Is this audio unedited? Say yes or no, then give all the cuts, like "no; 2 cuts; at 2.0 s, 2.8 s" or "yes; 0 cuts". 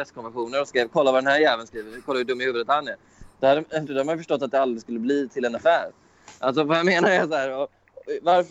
no; 1 cut; at 3.9 s